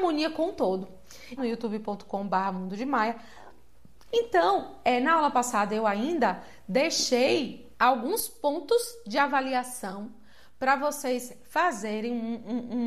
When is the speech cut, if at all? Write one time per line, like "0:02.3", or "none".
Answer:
0:01.4
0:04.1

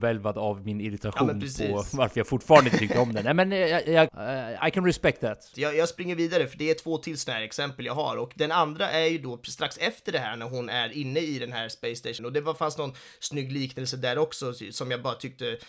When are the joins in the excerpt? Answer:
0:04.1
0:05.5
0:12.2

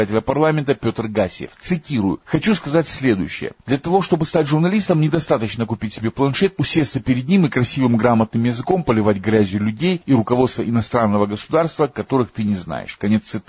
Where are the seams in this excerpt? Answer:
0:03.6
0:06.6

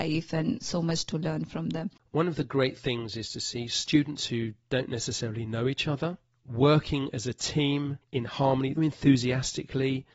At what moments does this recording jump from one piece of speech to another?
0:02.0
0:08.8

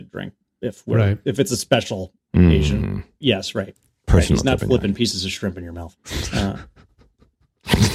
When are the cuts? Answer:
0:03.2
0:06.0

